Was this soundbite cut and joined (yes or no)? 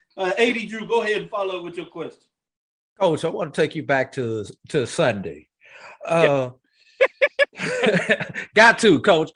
no